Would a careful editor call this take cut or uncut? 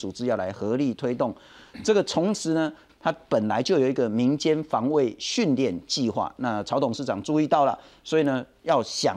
cut